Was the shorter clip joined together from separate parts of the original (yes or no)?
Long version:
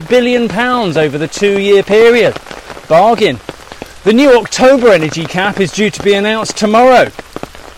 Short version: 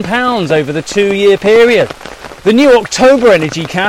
yes